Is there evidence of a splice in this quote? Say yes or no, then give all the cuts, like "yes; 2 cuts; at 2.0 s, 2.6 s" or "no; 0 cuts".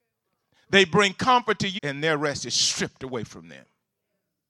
yes; 1 cut; at 1.8 s